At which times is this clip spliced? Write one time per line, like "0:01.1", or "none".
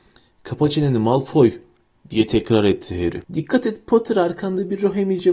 0:03.2